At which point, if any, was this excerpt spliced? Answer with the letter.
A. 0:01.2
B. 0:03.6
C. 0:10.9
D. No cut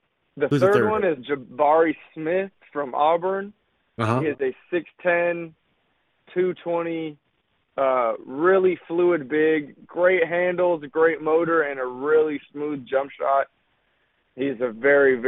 A